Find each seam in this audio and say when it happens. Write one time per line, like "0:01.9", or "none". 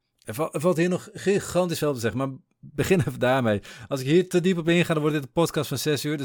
none